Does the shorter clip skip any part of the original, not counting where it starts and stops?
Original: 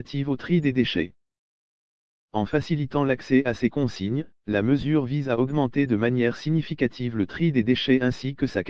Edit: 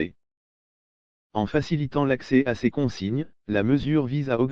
no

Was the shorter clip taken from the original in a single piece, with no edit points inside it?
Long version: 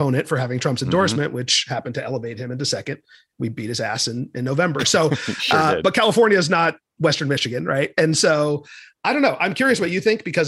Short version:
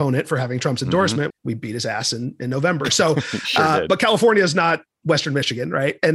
no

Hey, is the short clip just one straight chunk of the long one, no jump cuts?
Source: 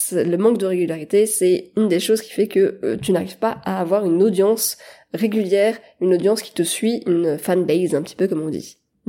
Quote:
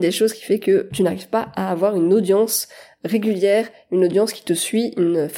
no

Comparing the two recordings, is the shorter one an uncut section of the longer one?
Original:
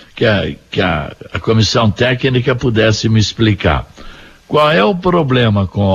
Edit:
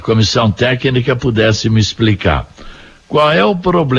yes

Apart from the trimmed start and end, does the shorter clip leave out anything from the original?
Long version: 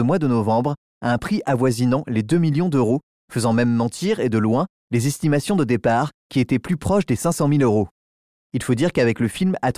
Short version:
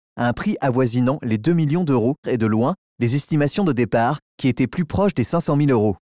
yes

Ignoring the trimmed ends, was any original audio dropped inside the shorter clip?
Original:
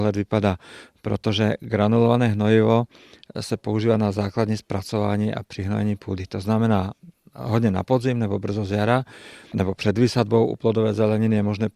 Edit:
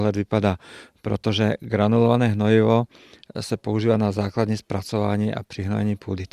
no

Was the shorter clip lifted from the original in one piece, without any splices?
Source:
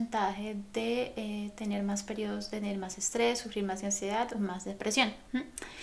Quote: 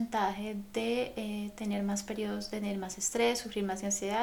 yes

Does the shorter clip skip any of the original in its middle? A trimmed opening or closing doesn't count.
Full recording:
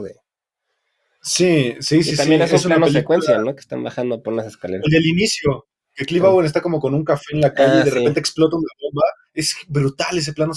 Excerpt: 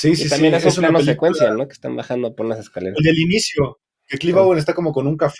no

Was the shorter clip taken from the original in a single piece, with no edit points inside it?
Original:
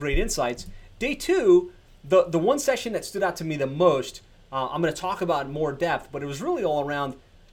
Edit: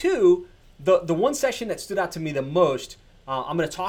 yes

